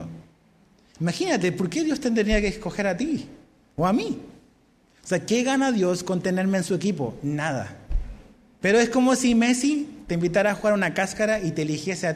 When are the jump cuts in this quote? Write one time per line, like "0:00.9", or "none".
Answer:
0:08.6